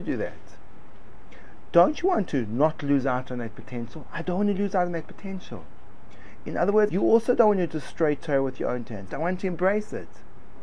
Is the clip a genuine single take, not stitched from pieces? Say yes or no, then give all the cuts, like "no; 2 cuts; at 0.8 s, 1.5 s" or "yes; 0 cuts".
no; 2 cuts; at 6.9 s, 9.1 s